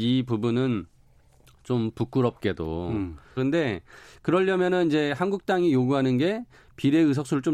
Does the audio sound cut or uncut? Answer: cut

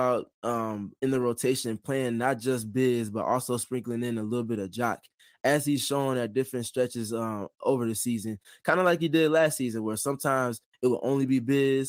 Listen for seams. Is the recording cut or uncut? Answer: uncut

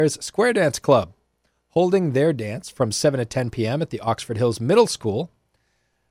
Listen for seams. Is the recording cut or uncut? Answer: uncut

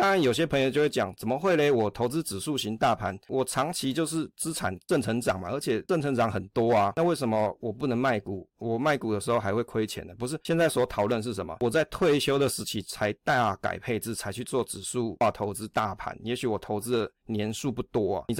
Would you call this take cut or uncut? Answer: uncut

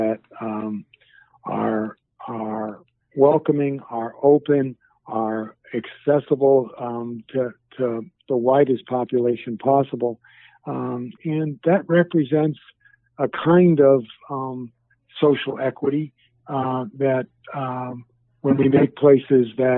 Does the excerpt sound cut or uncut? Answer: cut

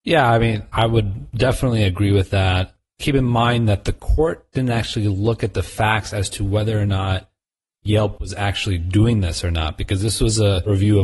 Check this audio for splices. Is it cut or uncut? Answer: uncut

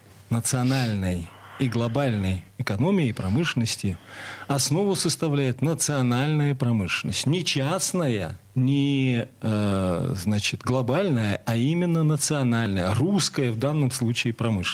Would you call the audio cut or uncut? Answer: cut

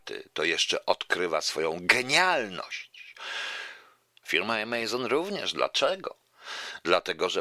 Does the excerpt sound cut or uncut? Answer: cut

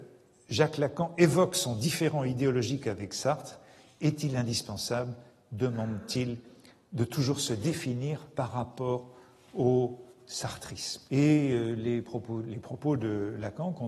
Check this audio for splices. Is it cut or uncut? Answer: cut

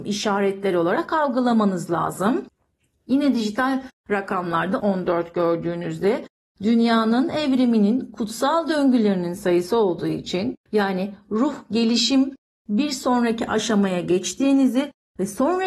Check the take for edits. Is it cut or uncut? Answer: cut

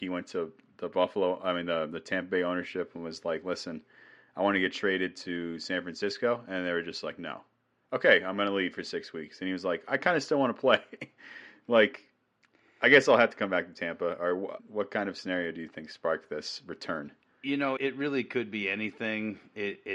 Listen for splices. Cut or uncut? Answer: cut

